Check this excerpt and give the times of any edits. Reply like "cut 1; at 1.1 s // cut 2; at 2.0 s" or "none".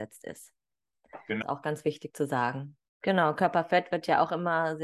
cut 1; at 1.4 s // cut 2; at 2.9 s

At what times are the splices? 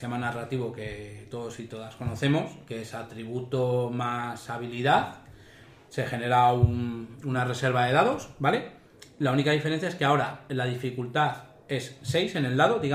none

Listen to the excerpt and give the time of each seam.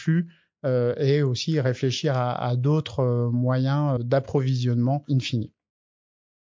cut 1; at 4.0 s

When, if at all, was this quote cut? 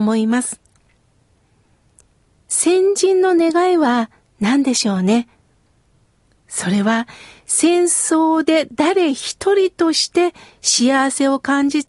none

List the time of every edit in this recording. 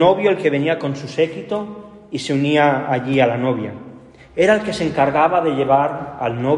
cut 1; at 4.2 s

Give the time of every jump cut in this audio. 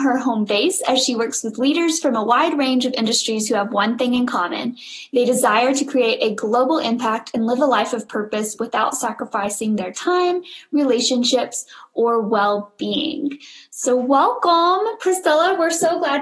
none

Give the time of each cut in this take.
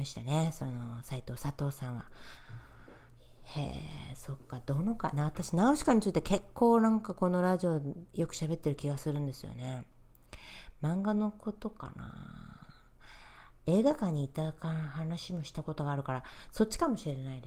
none

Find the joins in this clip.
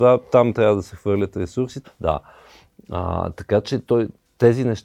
cut 1; at 1.8 s

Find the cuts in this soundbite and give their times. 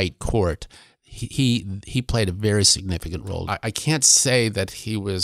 cut 1; at 3.4 s

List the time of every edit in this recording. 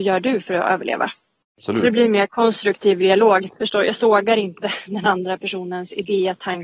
cut 1; at 1.4 s // cut 2; at 3.5 s

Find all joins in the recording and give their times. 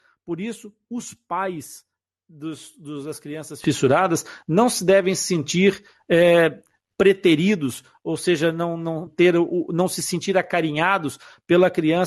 cut 1; at 9.1 s

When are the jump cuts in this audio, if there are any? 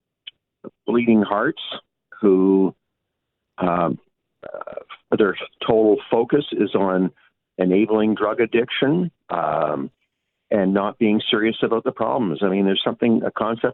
none

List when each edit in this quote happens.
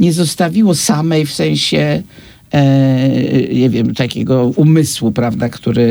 none

